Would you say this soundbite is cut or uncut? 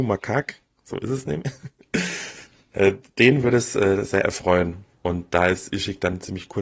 cut